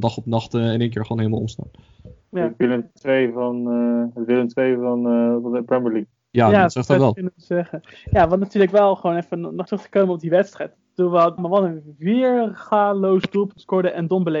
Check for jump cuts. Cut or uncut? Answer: cut